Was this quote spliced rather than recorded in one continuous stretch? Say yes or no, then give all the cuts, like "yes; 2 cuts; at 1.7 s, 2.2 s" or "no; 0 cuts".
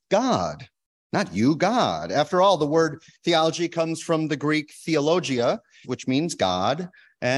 yes; 1 cut; at 5.8 s